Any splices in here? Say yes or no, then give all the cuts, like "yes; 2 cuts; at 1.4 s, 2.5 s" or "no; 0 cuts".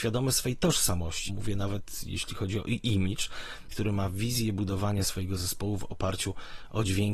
yes; 2 cuts; at 1.3 s, 3.7 s